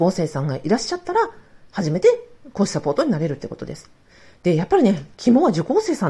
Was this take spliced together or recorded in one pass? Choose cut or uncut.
uncut